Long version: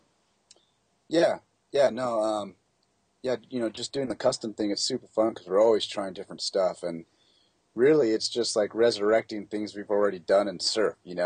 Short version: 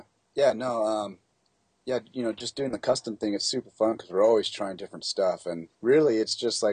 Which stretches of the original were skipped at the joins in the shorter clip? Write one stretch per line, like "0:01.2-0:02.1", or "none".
0:07.1-0:07.7